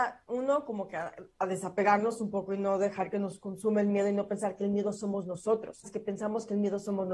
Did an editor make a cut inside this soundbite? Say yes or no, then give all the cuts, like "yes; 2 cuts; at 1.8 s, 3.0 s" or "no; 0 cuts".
yes; 1 cut; at 5.8 s